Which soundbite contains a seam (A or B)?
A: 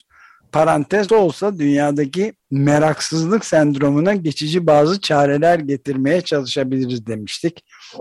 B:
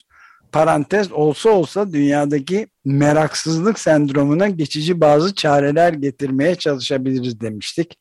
A